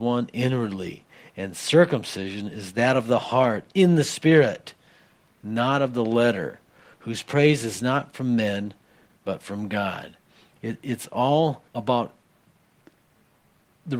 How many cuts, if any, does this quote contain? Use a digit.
2